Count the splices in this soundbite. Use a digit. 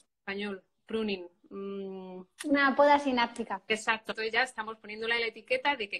1